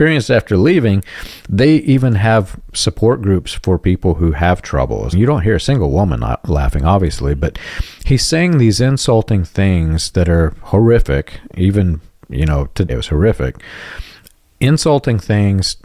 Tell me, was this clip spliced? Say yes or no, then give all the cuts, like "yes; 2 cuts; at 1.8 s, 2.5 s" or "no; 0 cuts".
yes; 2 cuts; at 5.1 s, 12.9 s